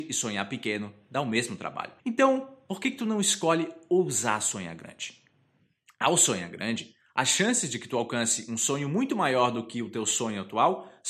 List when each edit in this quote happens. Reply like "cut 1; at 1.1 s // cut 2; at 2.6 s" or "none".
cut 1; at 2.0 s